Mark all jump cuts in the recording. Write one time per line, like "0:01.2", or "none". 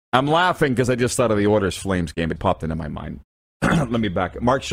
0:02.4